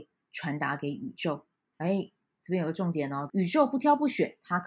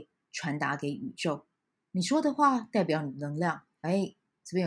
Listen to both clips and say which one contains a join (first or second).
first